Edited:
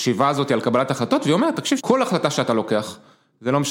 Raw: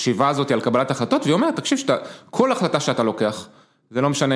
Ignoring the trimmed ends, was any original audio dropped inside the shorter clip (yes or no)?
yes